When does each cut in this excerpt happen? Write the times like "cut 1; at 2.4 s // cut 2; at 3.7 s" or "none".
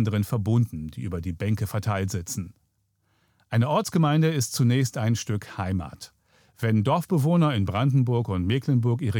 none